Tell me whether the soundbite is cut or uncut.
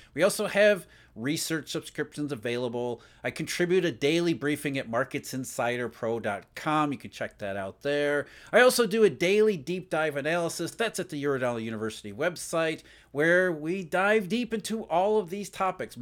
uncut